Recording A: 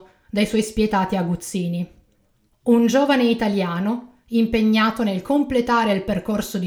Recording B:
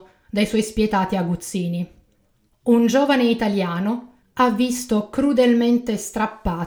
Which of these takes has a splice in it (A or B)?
B